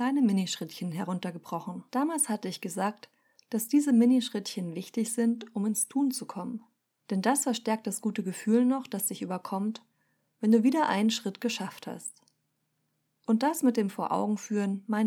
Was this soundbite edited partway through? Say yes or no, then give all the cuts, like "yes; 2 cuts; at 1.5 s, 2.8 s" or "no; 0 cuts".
yes; 2 cuts; at 1.9 s, 7.0 s